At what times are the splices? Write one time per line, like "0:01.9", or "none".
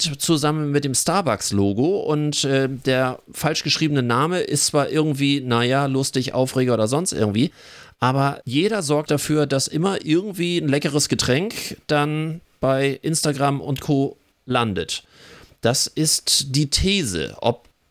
0:09.1

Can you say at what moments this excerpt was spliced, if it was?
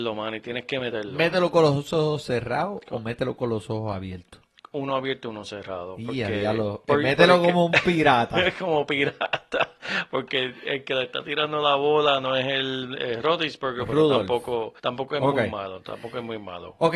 0:12.9
0:14.8

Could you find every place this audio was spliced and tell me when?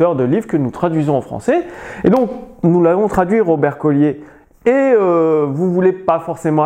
none

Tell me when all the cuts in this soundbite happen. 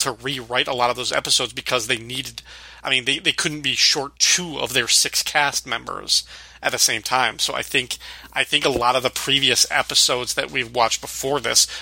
none

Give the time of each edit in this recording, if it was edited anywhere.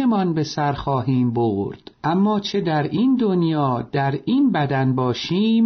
0:02.0

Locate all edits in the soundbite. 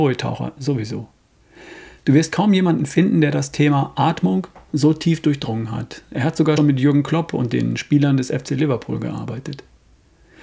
0:06.6

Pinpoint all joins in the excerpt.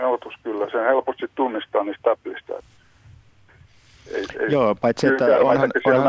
none

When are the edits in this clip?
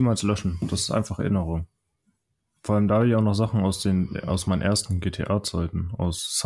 0:02.6

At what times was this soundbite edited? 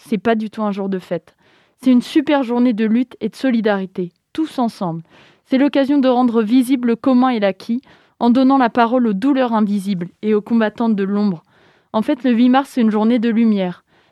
none

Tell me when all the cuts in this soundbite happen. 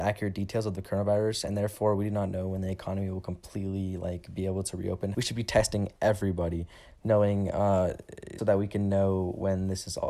0:05.1
0:08.4

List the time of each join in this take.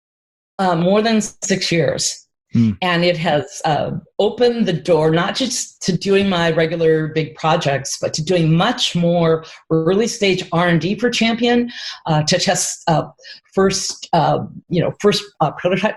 none

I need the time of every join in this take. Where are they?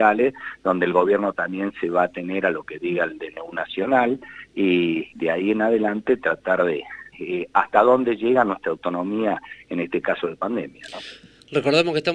0:05.1
0:07.1

